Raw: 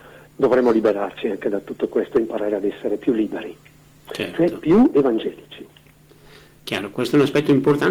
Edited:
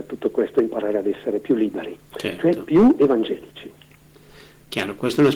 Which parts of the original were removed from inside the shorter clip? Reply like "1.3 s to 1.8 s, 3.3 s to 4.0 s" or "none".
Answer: 3.6 s to 4.0 s